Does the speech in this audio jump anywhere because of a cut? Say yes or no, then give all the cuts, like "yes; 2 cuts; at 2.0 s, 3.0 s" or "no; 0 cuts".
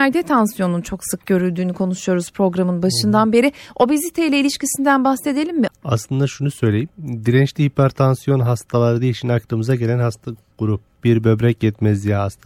yes; 1 cut; at 5.7 s